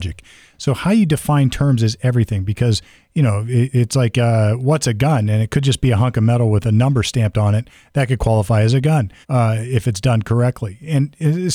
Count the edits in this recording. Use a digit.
1